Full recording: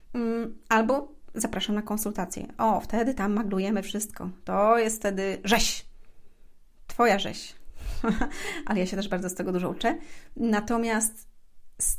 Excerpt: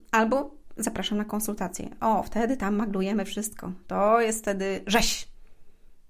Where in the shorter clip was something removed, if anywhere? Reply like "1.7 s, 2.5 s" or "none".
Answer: none